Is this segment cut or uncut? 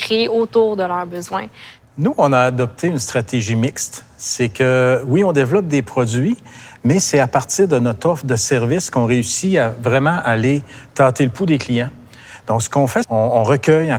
cut